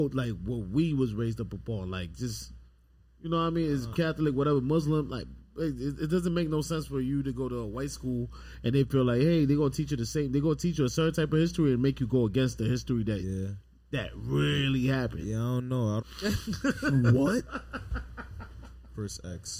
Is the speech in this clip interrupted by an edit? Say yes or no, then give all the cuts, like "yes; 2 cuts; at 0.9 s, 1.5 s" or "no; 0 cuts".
yes; 2 cuts; at 3.9 s, 16.0 s